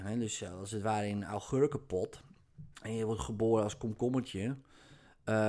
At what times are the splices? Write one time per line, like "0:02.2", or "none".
0:02.7